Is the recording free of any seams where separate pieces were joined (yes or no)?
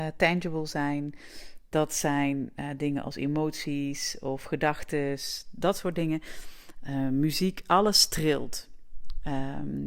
yes